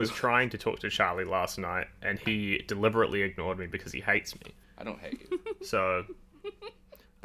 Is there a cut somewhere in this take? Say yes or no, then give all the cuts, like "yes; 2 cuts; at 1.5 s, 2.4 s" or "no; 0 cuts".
no; 0 cuts